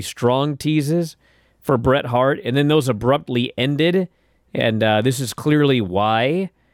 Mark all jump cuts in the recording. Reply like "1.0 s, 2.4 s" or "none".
none